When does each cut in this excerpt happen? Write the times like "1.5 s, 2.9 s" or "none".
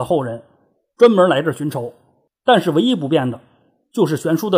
2.3 s